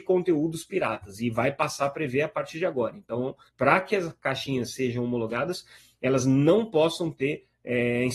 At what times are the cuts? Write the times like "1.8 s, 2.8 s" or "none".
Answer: 3.5 s